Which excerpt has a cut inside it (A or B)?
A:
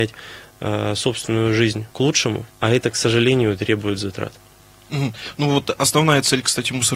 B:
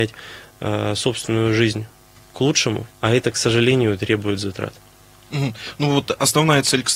A